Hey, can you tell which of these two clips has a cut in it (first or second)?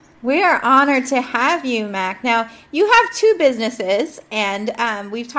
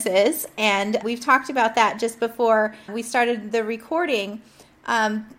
second